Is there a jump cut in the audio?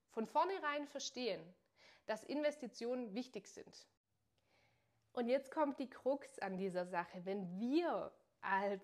no; 0 cuts

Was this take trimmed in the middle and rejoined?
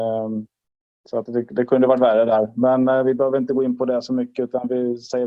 no; 0 cuts

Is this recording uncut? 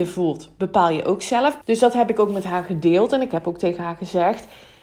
no; 1 cut; at 1.6 s

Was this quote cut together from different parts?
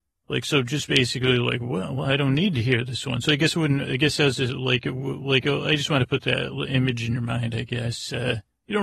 no; 0 cuts

